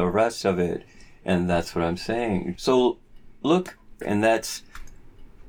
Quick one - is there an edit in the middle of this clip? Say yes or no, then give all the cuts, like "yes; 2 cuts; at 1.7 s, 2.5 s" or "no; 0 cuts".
yes; 2 cuts; at 2.6 s, 4.0 s